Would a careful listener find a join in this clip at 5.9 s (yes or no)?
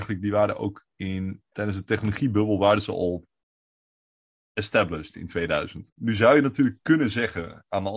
yes